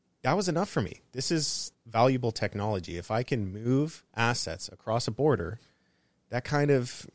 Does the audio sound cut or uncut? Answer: cut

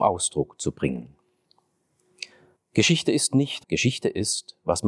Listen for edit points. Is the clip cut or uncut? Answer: cut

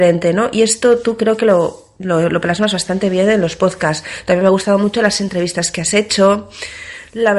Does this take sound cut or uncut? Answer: uncut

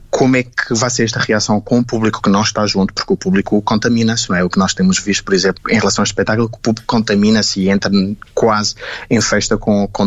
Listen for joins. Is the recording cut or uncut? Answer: cut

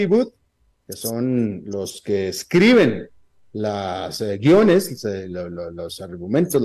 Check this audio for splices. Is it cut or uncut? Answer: uncut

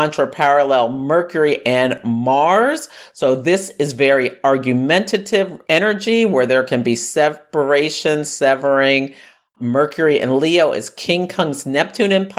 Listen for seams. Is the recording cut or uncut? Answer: uncut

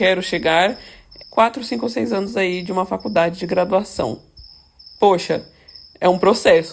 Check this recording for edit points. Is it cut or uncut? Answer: cut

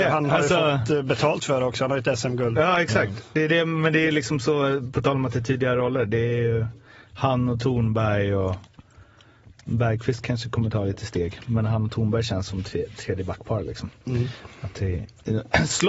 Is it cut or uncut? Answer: uncut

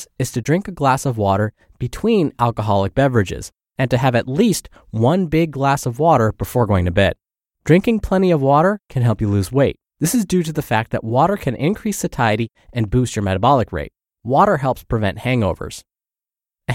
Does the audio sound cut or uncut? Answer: cut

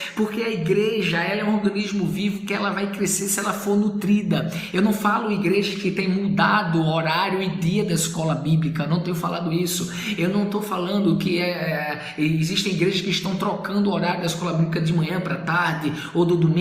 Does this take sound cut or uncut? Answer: cut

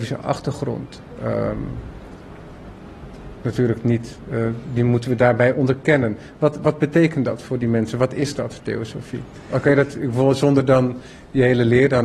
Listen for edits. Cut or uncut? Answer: uncut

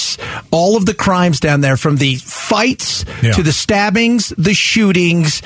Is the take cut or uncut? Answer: uncut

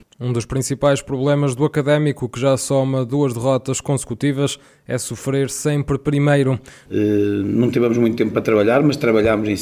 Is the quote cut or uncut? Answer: cut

